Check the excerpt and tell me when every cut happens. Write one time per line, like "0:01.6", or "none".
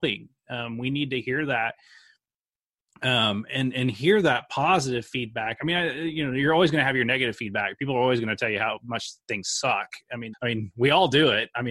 0:10.3